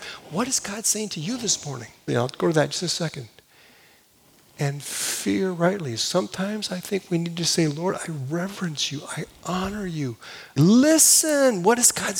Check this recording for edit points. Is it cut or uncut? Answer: cut